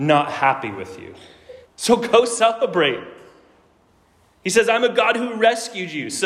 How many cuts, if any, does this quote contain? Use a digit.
1